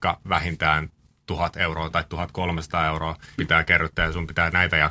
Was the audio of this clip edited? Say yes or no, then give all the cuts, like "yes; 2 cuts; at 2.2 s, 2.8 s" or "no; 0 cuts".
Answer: yes; 1 cut; at 3.4 s